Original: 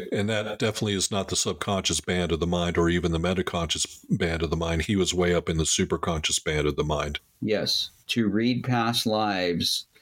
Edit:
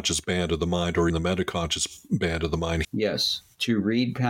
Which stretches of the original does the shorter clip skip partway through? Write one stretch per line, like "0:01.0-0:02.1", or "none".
0:02.9-0:03.1
0:04.8-0:07.3